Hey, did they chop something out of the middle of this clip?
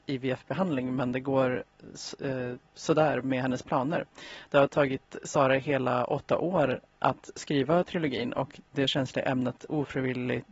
no; 0 cuts

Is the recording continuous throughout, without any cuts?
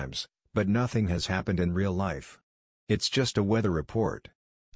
no; 1 cut; at 2.7 s

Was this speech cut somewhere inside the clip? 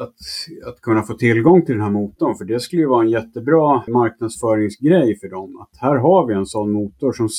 yes; 1 cut; at 3.9 s

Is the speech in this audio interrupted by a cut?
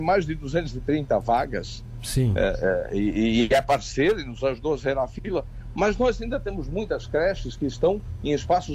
no; 0 cuts

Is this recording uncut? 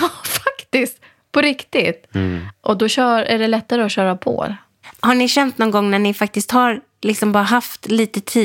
yes; 0 cuts

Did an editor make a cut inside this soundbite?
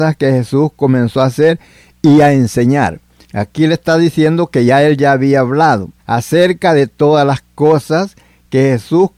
yes; 2 cuts; at 3.2 s, 6.0 s

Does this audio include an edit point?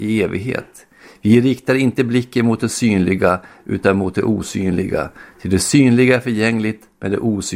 no; 0 cuts

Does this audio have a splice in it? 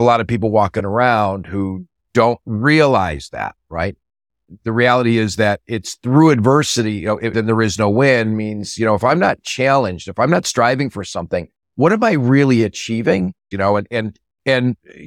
yes; 2 cuts; at 7.3 s, 13.5 s

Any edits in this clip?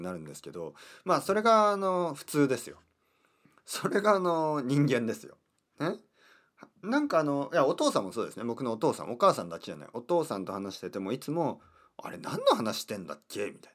no; 0 cuts

